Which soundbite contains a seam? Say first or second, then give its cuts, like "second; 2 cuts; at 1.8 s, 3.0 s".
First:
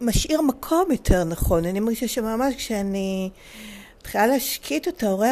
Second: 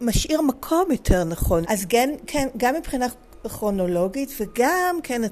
second; 1 cut; at 1.6 s